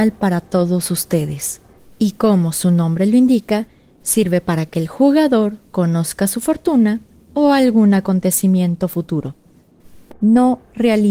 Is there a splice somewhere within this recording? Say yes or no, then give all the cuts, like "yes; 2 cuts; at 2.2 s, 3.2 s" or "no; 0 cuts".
yes; 2 cuts; at 1.8 s, 10.1 s